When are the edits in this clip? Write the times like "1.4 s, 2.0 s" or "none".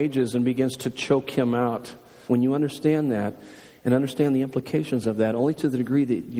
2.3 s